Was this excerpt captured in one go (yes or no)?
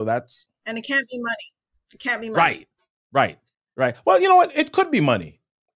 yes